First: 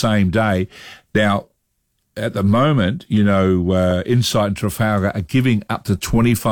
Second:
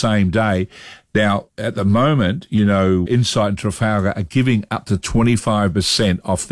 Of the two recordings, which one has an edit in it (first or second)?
second